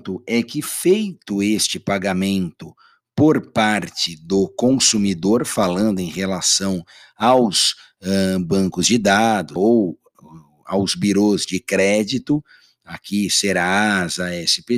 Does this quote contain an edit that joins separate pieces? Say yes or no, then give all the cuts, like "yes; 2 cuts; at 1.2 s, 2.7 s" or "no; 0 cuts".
yes; 1 cut; at 9.6 s